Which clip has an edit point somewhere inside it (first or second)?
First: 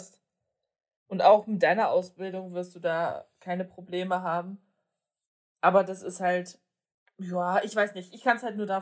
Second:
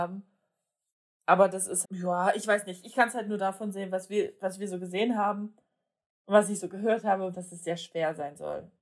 second